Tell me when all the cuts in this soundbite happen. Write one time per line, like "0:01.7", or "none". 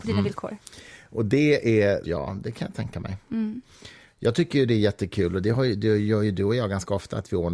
0:02.0